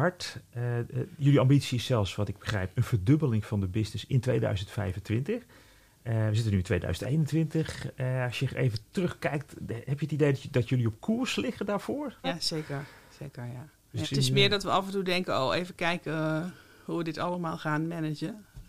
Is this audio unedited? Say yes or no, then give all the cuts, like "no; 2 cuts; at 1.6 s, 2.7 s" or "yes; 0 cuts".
no; 2 cuts; at 12.2 s, 14.0 s